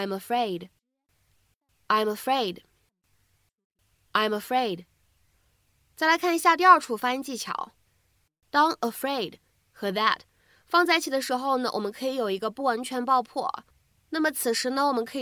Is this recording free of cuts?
yes; 0 cuts

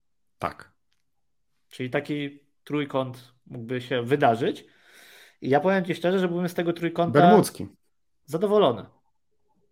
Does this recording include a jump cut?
no; 0 cuts

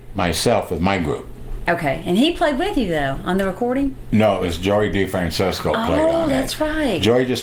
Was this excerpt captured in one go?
yes; 0 cuts

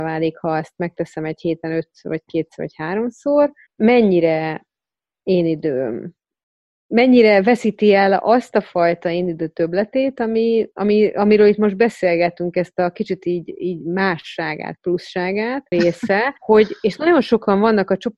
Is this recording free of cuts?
no; 1 cut; at 15.7 s

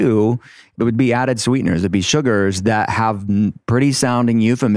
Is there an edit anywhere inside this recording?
no; 0 cuts

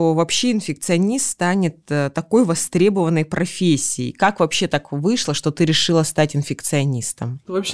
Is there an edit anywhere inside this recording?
no; 0 cuts

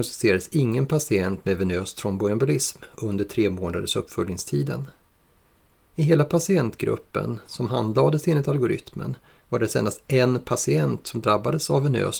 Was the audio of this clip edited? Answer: no; 0 cuts

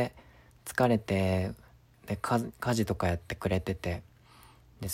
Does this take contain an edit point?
yes; 1 cut; at 1.9 s

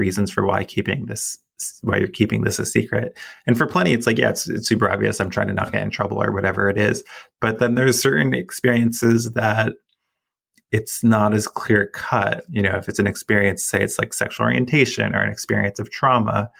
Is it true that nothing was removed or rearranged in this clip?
yes; 0 cuts

